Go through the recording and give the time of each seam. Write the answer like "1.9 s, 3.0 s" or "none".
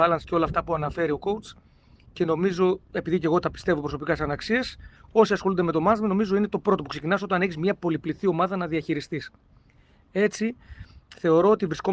none